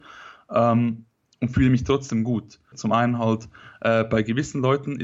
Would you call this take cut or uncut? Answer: cut